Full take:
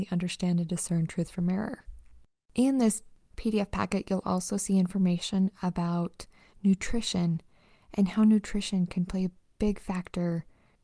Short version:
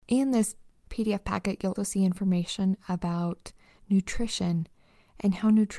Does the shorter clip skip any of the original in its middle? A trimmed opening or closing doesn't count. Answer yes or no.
yes